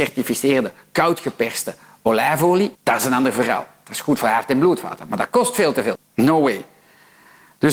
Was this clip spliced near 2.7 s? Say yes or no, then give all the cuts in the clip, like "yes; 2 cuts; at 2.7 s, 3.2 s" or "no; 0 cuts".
yes; 2 cuts; at 2.7 s, 5.9 s